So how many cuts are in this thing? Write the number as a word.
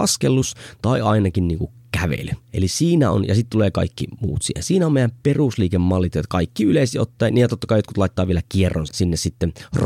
one